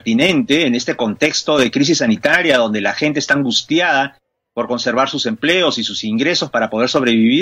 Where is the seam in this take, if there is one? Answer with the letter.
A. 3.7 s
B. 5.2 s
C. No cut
C